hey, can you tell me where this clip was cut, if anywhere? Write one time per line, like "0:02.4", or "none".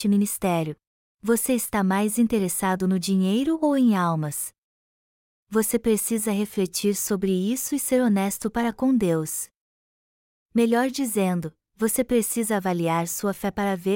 0:01.0